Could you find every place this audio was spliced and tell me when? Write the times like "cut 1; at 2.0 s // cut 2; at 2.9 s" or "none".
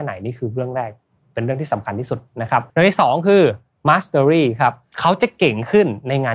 cut 1; at 2.7 s

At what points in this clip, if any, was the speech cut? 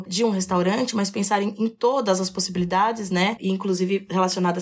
none

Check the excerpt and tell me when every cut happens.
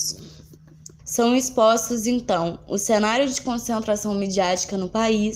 cut 1; at 1.0 s

